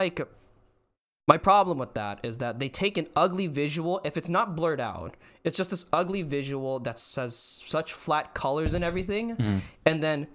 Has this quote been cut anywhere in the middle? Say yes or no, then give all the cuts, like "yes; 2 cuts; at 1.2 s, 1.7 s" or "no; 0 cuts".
no; 0 cuts